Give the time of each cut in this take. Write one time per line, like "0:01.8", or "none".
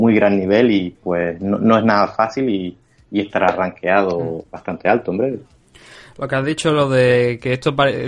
0:01.0